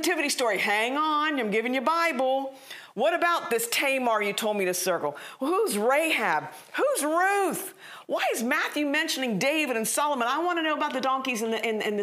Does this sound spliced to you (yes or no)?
no